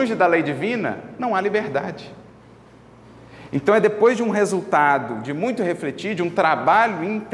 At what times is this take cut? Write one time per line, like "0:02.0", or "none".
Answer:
none

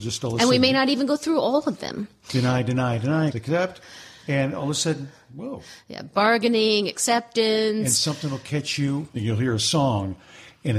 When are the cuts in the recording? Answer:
0:03.3
0:09.1

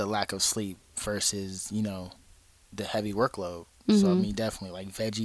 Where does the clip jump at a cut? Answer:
0:04.3

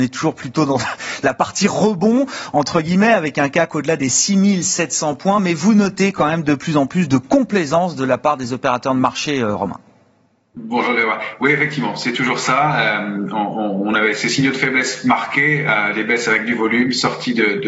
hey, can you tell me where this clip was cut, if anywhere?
none

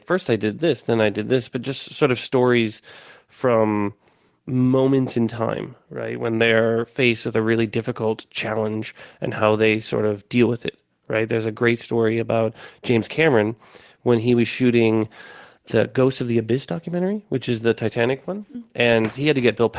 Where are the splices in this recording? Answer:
none

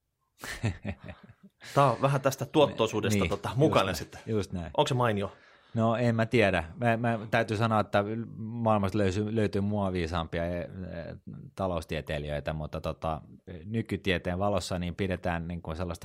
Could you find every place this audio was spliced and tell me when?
none

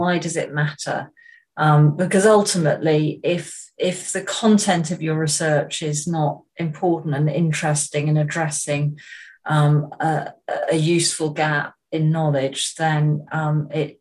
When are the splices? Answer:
none

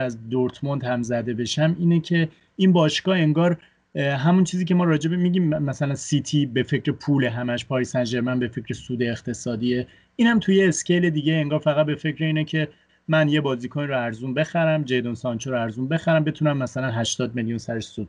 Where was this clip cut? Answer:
none

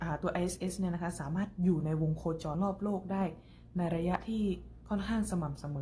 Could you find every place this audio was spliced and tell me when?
0:02.5

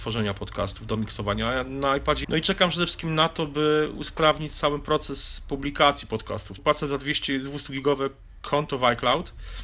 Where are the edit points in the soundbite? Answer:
0:02.2
0:06.6

